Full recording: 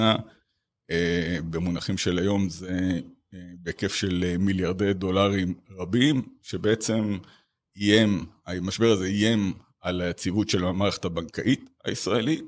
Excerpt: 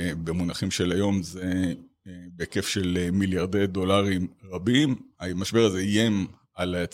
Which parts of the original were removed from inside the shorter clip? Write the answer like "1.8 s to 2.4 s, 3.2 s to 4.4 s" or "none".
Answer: 6.4 s to 8.4 s